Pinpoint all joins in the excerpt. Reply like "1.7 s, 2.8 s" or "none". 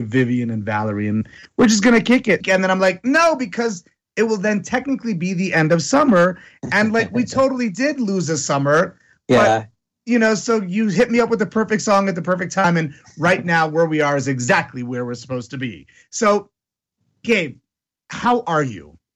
2.4 s